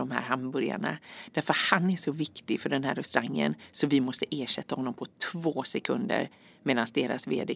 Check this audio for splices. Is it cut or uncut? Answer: uncut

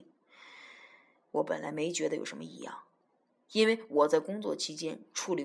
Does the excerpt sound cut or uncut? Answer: uncut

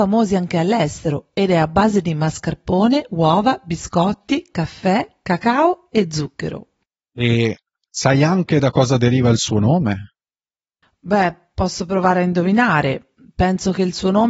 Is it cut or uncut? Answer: uncut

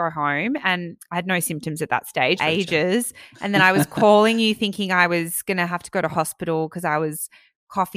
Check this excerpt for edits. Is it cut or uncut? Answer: cut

